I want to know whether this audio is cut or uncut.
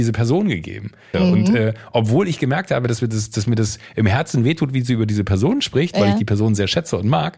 cut